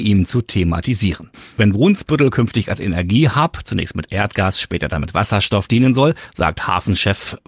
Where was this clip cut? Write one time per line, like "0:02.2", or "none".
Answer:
0:06.3